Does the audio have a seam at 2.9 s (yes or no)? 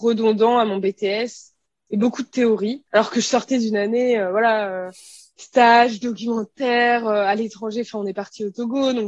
yes